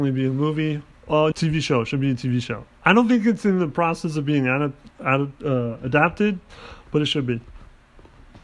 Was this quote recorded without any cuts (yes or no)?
no